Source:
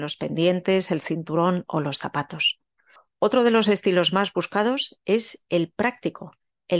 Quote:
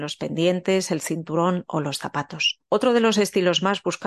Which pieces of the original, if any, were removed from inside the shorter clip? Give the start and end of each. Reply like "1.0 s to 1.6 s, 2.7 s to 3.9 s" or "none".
2.7 s to 3.2 s

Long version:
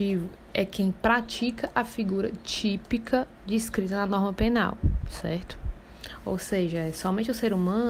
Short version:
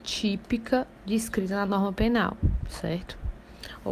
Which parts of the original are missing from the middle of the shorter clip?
none

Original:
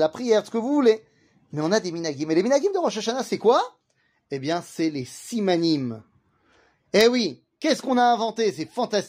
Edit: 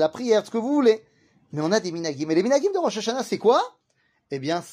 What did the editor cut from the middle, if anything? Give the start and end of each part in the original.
none

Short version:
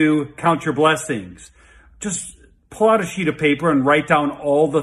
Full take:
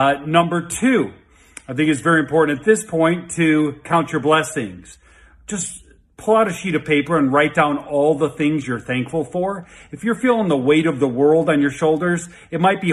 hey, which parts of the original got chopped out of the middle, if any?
none

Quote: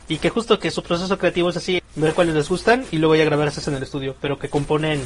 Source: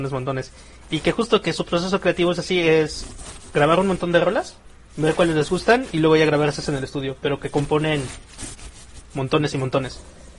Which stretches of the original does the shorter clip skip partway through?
2.6 s to 4.8 s

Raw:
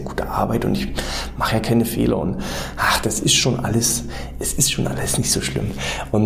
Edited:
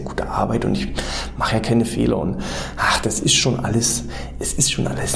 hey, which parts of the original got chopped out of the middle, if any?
none

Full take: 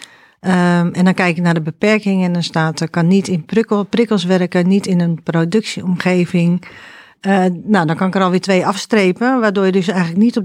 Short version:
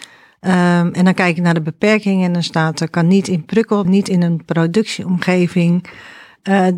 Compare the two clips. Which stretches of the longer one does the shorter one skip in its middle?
3.8 s to 4.6 s

